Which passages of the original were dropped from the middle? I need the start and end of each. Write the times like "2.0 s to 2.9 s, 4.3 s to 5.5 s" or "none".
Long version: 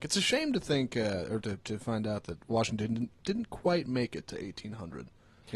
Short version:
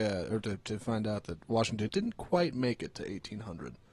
2.9 s to 3.2 s